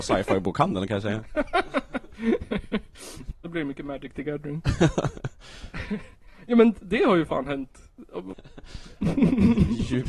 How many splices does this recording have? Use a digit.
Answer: 2